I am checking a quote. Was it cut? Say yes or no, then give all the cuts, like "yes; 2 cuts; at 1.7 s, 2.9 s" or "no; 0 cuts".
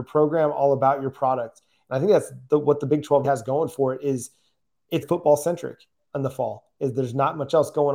yes; 2 cuts; at 3.2 s, 5.0 s